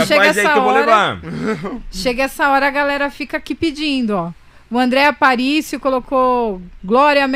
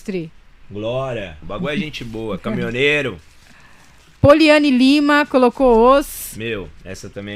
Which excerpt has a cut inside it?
second; 1 cut; at 1.4 s

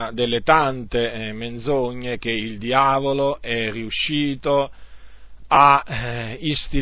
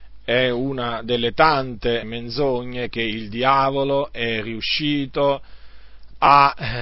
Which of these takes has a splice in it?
second; 1 cut; at 2.0 s

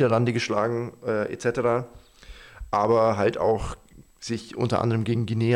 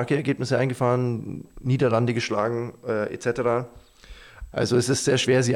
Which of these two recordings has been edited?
second; 1 cut; at 4.5 s

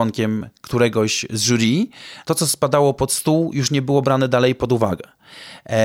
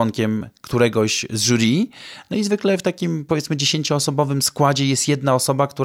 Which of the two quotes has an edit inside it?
first; 1 cut; at 2.2 s

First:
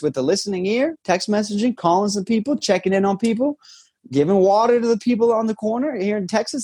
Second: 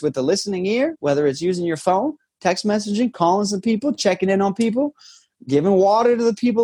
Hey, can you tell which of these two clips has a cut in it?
first; 1 cut; at 1.0 s

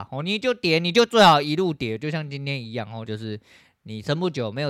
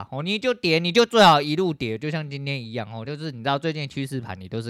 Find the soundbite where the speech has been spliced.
first; 1 cut; at 3.0 s

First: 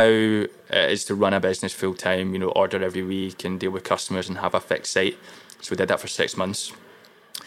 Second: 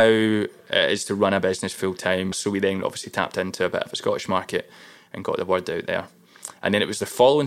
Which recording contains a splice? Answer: second; 1 cut; at 2.3 s

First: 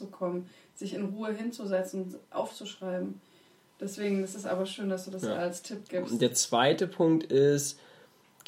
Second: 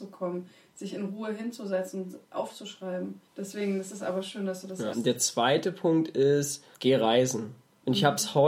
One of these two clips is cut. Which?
second; 3 cuts; at 3.3 s, 4.9 s, 6.7 s

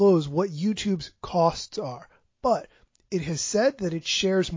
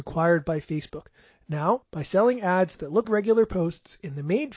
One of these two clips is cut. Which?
second; 2 cuts; at 1.8 s, 3.0 s

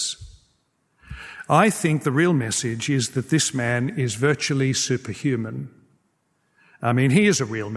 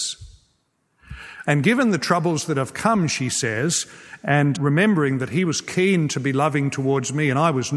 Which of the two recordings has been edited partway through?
second; 2 cuts; at 1.4 s, 4.6 s

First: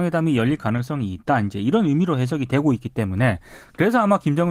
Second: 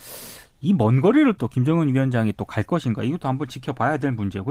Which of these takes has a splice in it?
second; 1 cut; at 1.4 s

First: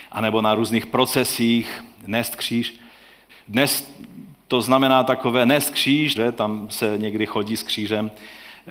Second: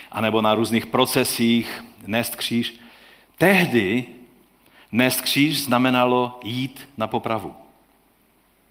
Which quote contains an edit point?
first; 2 cuts; at 3.3 s, 6.1 s

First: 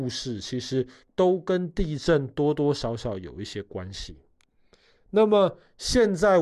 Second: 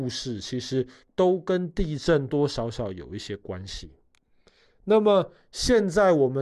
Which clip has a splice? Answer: second; 1 cut; at 2.3 s

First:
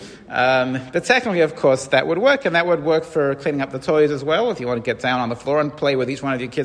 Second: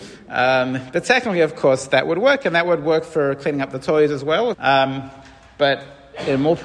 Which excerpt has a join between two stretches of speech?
second; 1 cut; at 4.5 s

